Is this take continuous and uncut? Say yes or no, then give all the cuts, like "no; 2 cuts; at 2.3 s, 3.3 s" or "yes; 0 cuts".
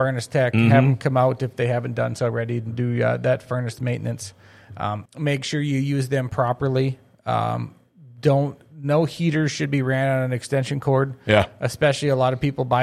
no; 1 cut; at 5.1 s